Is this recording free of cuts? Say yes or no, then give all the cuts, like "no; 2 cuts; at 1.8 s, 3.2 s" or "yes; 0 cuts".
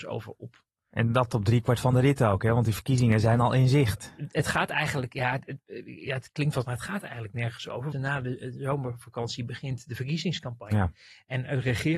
no; 2 cuts; at 6.6 s, 7.9 s